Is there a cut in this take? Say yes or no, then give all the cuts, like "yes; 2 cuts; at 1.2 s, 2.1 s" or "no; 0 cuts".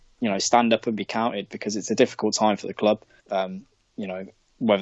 yes; 1 cut; at 3.2 s